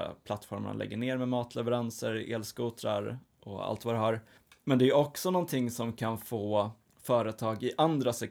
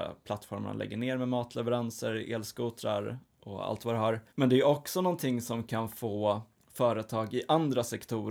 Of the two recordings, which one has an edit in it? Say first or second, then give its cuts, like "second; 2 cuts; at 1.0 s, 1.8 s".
second; 1 cut; at 4.3 s